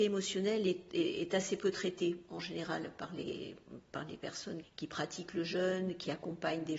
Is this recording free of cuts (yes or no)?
no